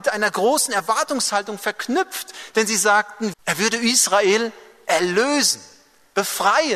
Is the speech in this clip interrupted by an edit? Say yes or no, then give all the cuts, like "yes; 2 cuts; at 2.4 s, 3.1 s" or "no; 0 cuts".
yes; 1 cut; at 3.3 s